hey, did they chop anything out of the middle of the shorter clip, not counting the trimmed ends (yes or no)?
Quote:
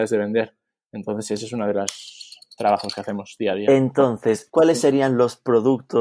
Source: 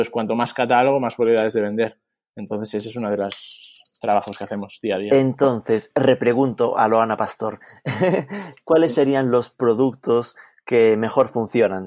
yes